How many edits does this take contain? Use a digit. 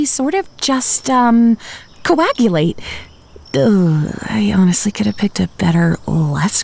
0